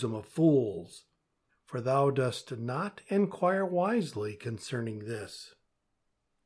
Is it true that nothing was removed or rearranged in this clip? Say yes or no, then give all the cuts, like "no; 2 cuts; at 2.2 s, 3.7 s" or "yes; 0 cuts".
no; 1 cut; at 1.5 s